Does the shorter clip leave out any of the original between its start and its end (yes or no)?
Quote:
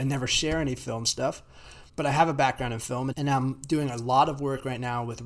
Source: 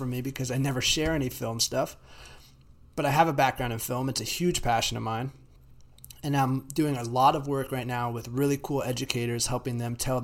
yes